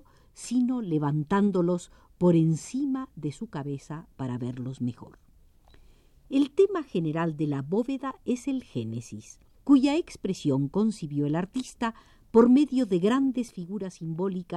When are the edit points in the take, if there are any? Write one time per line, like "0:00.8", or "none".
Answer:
0:09.5